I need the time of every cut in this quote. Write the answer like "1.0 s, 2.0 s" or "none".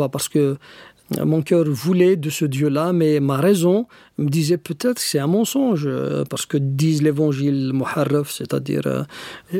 none